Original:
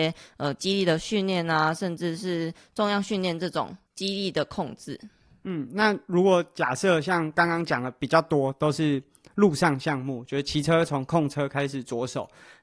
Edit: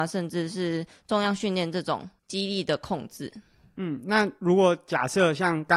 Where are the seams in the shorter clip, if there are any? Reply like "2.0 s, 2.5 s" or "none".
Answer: none